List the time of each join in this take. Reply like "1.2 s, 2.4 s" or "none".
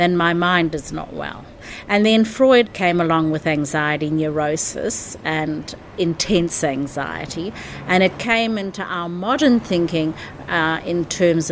2.7 s